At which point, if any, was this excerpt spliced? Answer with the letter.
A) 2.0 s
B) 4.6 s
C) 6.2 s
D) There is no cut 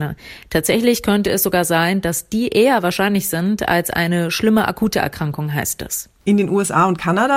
C